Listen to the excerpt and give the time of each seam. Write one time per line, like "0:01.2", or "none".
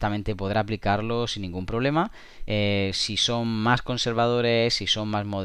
0:02.5